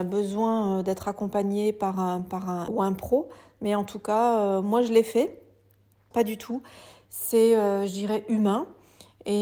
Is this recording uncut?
no; 2 cuts; at 2.7 s, 6.1 s

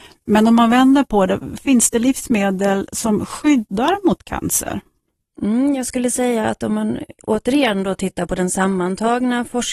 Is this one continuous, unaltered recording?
yes; 0 cuts

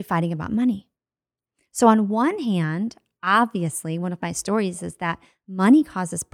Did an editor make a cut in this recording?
no; 0 cuts

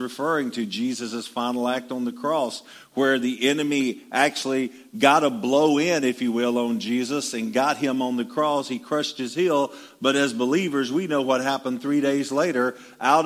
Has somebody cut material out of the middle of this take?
no; 0 cuts

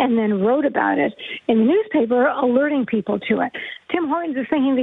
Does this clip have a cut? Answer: yes; 1 cut; at 3.8 s

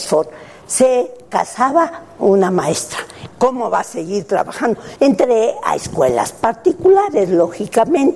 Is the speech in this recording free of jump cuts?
no; 2 cuts; at 3.3 s, 5.0 s

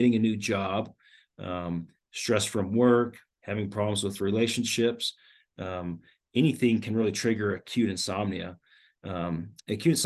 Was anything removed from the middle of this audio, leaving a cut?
yes; 1 cut; at 3.3 s

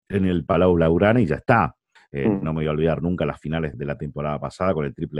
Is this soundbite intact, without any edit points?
no; 2 cuts; at 2.0 s, 3.7 s

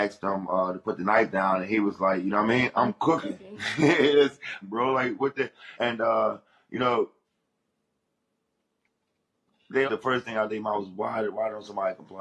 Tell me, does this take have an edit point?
yes; 3 cuts; at 4.6 s, 5.8 s, 9.9 s

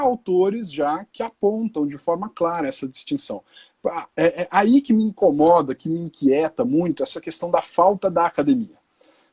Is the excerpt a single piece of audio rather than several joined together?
yes; 0 cuts

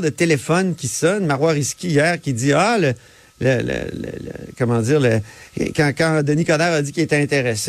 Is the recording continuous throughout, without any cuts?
yes; 0 cuts

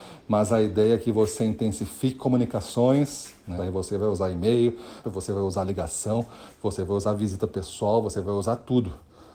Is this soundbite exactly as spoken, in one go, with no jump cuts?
no; 2 cuts; at 3.6 s, 5.0 s

